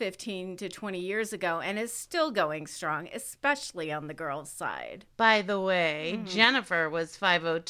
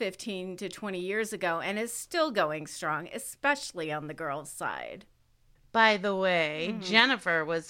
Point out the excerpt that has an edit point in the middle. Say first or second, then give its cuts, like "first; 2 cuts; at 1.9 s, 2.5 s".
first; 1 cut; at 5.1 s